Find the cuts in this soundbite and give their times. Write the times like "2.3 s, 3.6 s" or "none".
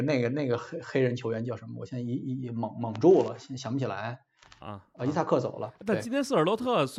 4.6 s